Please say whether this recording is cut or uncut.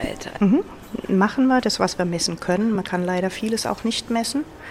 uncut